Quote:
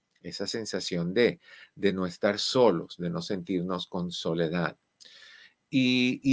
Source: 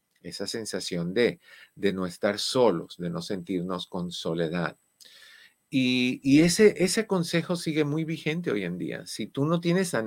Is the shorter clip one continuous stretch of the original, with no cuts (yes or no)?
yes